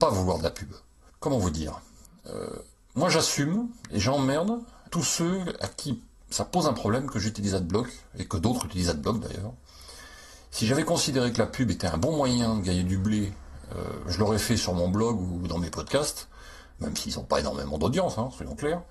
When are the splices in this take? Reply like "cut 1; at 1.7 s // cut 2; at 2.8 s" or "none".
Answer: none